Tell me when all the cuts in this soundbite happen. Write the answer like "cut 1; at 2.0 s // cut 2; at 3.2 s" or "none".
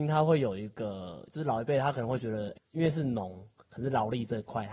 cut 1; at 2.6 s

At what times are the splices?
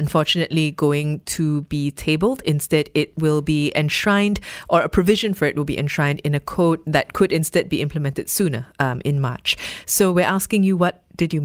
none

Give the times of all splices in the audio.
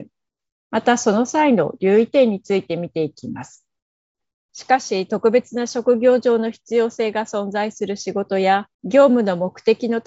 cut 1; at 4.5 s // cut 2; at 8.7 s

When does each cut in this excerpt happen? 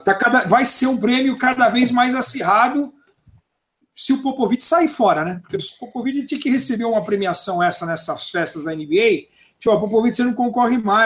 none

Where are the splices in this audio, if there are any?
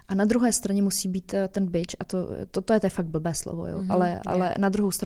none

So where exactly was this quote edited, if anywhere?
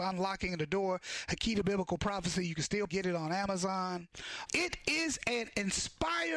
cut 1; at 2.9 s // cut 2; at 4.5 s

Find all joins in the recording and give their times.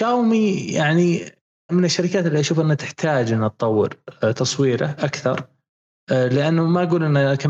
cut 1; at 1.7 s

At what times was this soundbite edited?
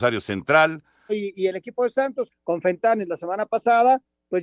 cut 1; at 1.1 s // cut 2; at 2.3 s

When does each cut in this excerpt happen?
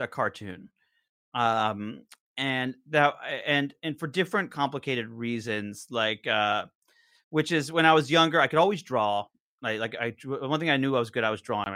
none

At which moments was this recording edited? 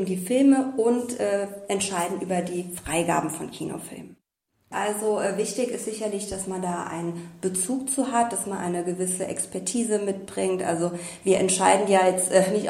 cut 1; at 4.7 s

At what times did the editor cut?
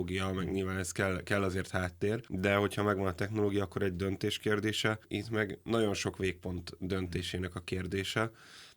none

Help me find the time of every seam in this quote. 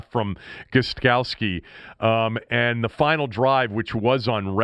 none

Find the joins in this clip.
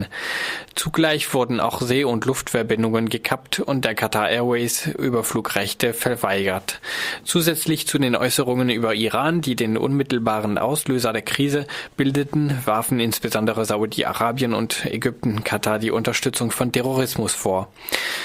none

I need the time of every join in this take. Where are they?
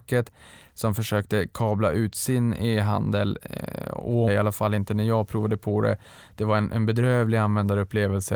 cut 1; at 4.3 s

